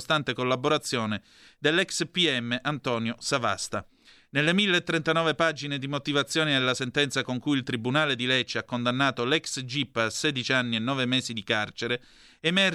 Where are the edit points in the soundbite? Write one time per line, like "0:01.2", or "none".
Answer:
none